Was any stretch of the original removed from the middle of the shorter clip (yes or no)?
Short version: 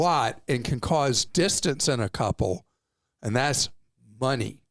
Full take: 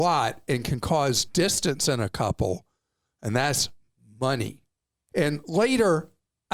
no